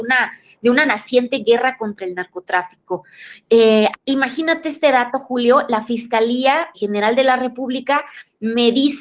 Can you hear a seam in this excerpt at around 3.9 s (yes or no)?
yes